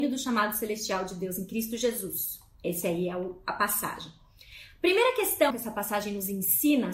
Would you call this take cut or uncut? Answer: cut